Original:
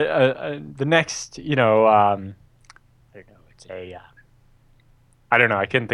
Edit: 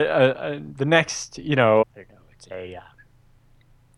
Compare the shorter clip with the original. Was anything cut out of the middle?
yes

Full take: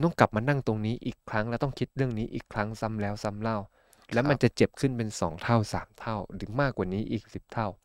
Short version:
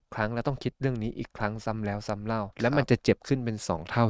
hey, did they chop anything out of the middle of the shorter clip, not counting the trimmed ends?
yes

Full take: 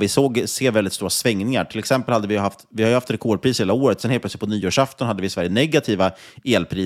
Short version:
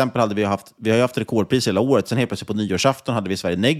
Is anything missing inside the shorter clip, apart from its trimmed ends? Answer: no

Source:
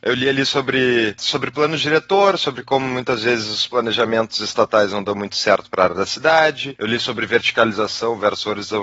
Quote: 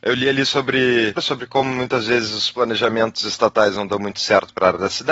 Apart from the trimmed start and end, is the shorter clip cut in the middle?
yes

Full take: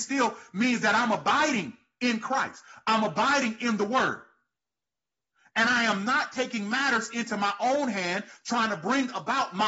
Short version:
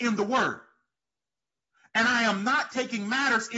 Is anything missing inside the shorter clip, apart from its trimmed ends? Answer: no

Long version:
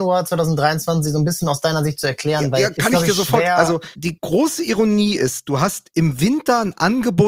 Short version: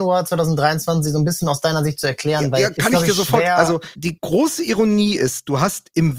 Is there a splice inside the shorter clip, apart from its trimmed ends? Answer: no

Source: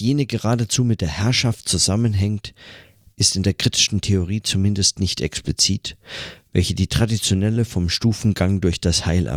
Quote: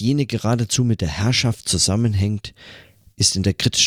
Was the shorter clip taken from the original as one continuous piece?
yes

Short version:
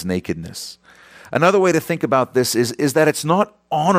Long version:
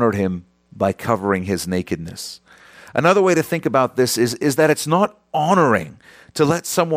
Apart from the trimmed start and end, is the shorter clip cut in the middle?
no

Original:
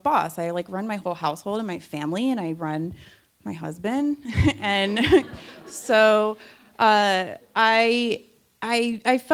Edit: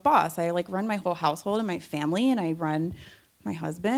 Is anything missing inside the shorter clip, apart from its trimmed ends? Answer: no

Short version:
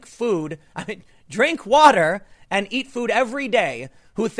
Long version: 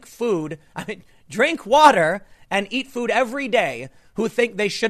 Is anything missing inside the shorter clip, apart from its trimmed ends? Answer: no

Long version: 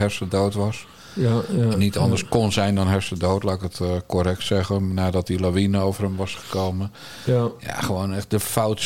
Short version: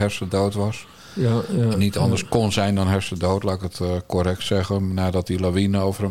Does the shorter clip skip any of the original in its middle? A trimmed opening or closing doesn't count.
no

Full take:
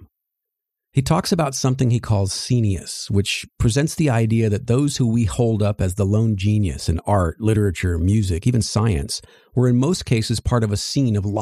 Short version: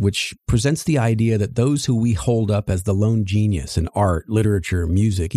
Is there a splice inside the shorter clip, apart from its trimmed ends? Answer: no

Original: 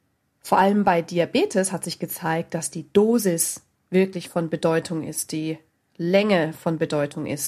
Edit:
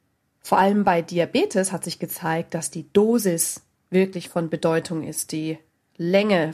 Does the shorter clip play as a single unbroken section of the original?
yes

